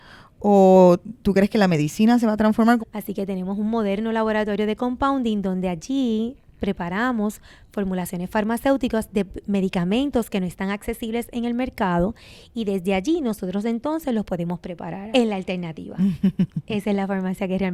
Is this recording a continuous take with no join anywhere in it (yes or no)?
no